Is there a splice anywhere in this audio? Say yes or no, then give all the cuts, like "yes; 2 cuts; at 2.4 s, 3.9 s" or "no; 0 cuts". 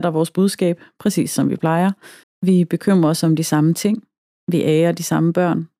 yes; 1 cut; at 2.2 s